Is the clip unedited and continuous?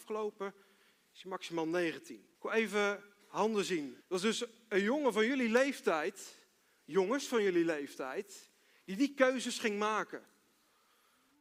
no; 2 cuts; at 2.4 s, 4.0 s

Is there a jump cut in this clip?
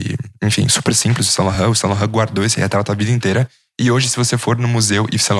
no; 0 cuts

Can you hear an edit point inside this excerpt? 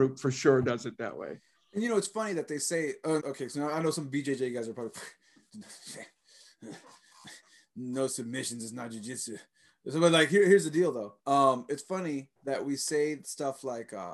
yes; 3 cuts; at 3.2 s, 11.2 s, 12.4 s

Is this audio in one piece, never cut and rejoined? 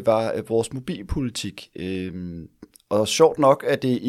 yes; 0 cuts

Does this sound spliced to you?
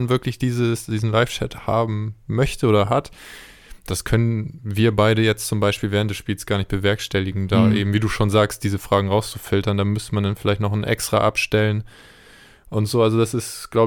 no; 0 cuts

